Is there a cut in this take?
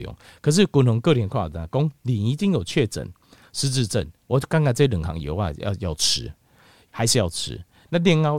no; 0 cuts

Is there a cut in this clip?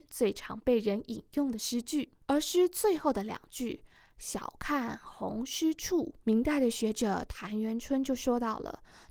yes; 2 cuts; at 2.2 s, 6.2 s

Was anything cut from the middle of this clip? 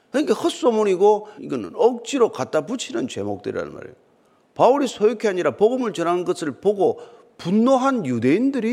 yes; 1 cut; at 1.4 s

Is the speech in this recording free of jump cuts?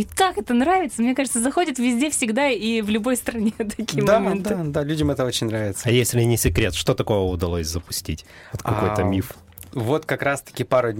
yes; 0 cuts

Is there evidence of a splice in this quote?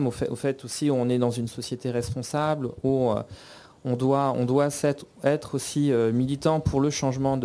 no; 0 cuts

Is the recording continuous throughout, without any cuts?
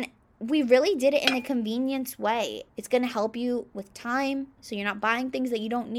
no; 2 cuts; at 2.7 s, 4.6 s

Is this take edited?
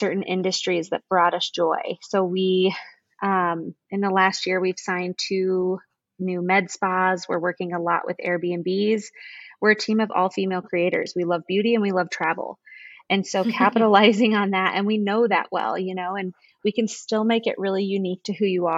no; 0 cuts

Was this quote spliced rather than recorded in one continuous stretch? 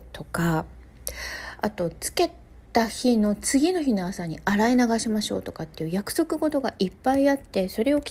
no; 0 cuts

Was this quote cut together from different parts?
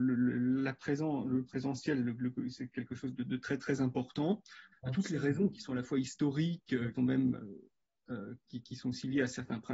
yes; 3 cuts; at 4.7 s, 6.9 s, 8.5 s

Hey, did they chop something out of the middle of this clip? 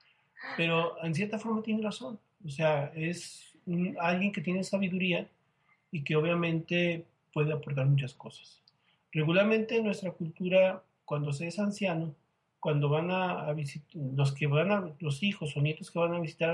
no; 0 cuts

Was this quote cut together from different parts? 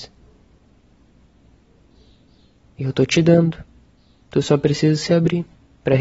no; 0 cuts

